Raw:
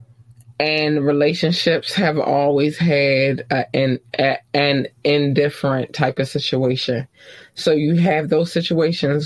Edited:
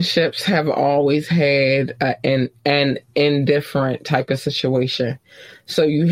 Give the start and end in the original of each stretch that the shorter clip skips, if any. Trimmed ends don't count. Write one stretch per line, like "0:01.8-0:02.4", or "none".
0:04.1-0:04.4